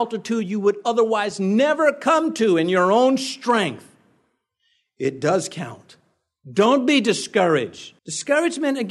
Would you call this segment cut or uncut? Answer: cut